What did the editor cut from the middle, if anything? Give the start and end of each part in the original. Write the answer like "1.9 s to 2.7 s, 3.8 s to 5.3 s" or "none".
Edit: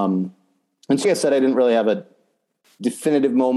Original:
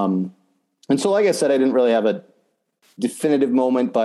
1.0 s to 1.2 s